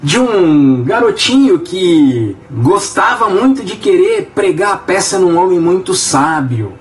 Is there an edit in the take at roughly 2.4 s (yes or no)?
yes